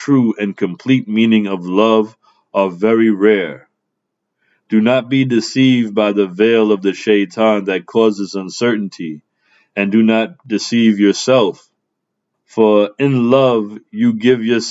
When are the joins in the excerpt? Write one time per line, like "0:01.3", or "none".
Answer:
0:12.3